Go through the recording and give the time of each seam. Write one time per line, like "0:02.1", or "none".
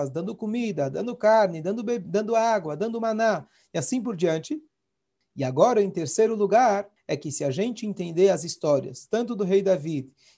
0:05.2
0:07.0